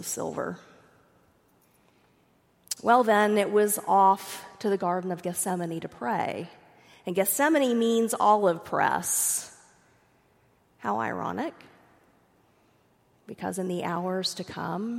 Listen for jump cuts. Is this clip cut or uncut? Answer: uncut